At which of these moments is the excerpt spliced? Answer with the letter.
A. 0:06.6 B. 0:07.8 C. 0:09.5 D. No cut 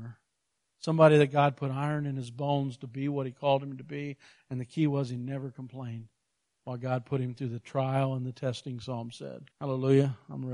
C